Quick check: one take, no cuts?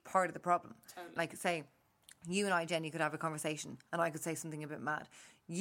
no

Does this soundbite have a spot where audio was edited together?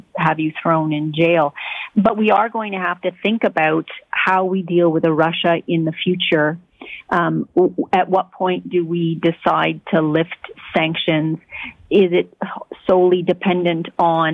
no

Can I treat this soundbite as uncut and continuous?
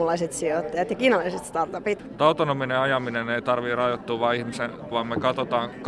no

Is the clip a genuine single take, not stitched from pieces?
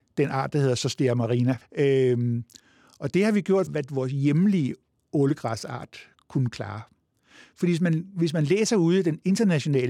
no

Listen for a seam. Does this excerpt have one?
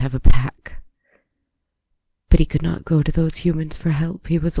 no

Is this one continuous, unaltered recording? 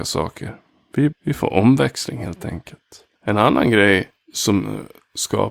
no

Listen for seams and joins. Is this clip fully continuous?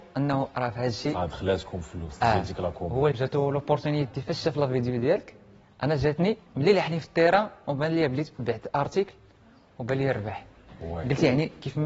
no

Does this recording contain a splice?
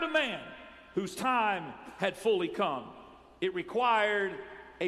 no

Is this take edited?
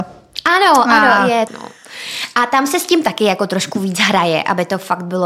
yes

